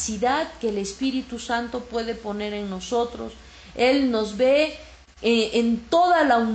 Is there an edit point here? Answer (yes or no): no